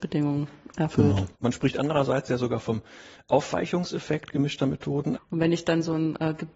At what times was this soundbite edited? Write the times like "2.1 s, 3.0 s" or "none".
1.3 s, 5.1 s